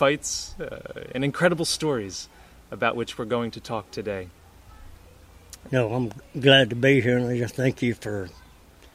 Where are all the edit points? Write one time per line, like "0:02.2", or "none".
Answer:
0:05.7